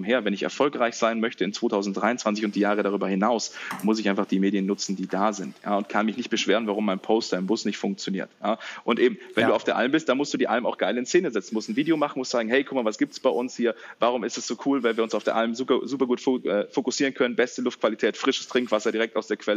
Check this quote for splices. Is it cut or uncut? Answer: uncut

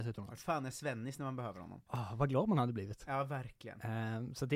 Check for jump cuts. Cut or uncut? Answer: cut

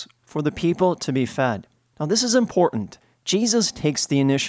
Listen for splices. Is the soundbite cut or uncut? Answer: uncut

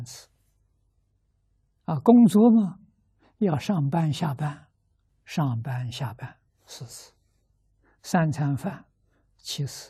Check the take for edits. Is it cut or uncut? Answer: cut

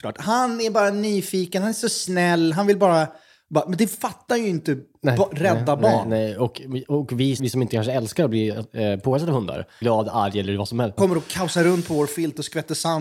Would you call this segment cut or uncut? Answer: cut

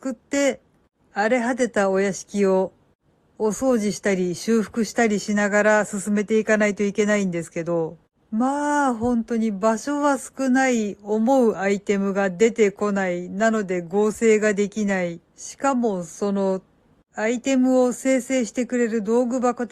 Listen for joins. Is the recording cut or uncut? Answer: cut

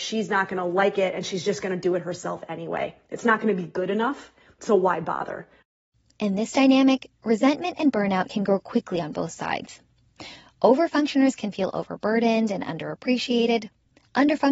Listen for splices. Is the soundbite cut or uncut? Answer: uncut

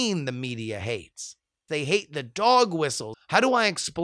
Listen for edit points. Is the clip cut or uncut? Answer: cut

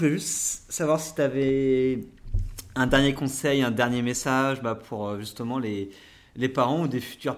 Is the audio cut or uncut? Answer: uncut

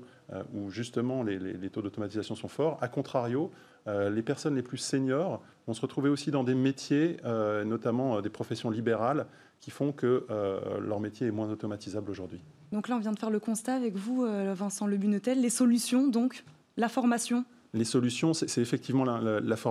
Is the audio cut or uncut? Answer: uncut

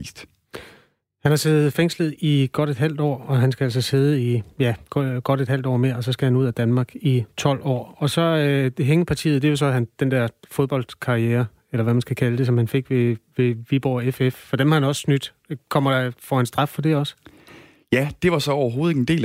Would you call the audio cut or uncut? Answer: uncut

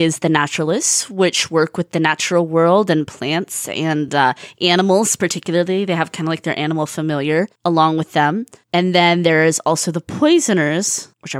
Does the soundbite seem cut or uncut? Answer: uncut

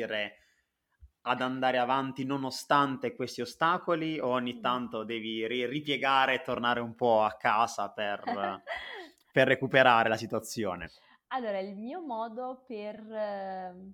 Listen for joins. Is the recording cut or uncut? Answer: uncut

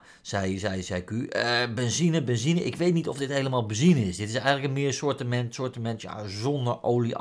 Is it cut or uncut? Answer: uncut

